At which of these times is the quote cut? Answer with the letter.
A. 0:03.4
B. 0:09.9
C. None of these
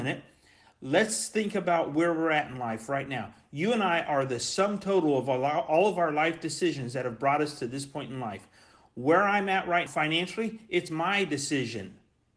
B